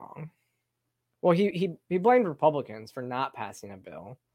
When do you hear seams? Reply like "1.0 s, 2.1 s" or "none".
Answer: none

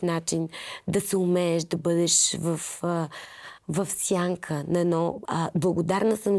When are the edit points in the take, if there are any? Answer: 3.6 s, 5.3 s

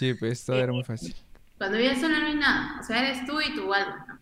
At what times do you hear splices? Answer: 1.6 s

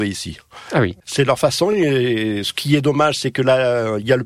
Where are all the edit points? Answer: none

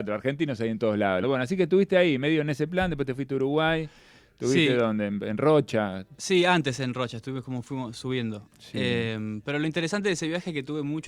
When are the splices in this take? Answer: 1.2 s

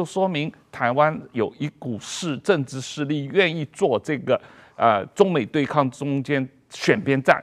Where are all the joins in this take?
none

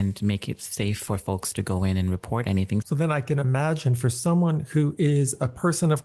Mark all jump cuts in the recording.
2.8 s

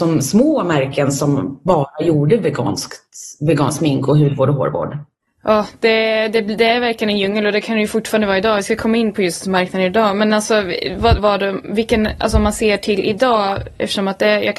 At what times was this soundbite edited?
11.2 s

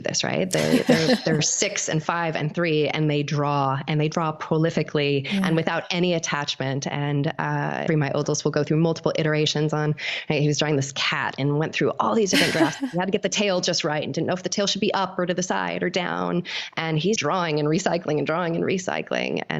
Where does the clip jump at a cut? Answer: 7.9 s, 17.2 s

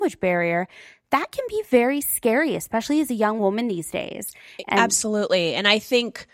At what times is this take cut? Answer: none

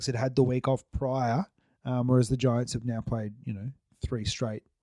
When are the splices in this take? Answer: none

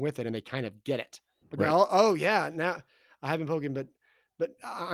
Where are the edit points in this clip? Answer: 1.4 s

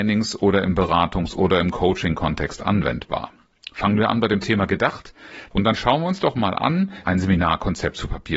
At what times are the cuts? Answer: 5.5 s, 7.0 s

